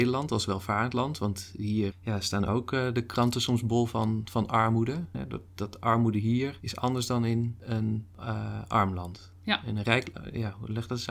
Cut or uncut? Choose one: cut